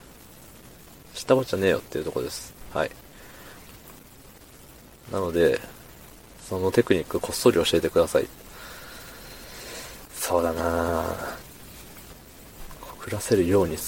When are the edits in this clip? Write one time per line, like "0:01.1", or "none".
none